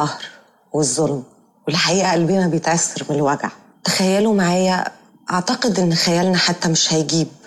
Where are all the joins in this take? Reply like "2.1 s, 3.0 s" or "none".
none